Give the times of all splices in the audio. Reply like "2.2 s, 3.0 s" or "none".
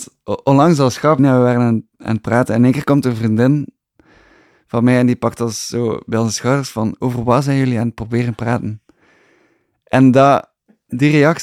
1.2 s